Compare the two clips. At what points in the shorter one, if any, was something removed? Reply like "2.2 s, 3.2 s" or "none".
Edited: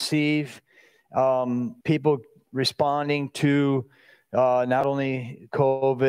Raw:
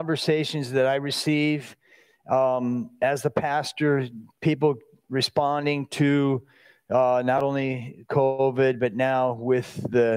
1.8 s